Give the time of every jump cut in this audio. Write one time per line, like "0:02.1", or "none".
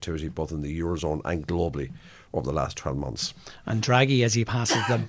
none